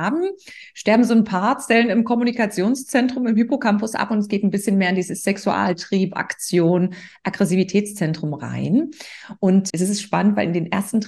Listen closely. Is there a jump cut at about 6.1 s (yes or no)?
no